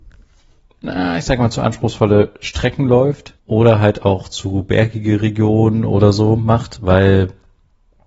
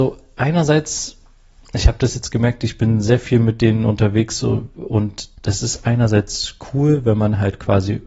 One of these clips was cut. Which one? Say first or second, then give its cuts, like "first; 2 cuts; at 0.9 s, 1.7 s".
first; 1 cut; at 3.4 s